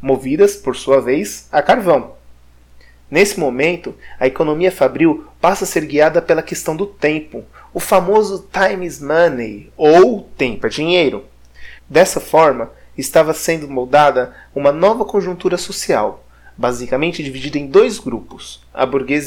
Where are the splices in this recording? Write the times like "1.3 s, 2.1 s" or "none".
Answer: 11.8 s